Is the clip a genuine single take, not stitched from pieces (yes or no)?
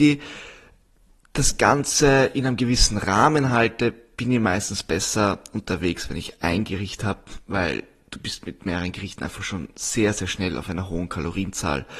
yes